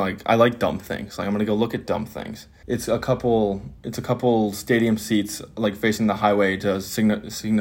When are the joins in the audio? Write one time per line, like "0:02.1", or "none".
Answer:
0:02.6
0:03.8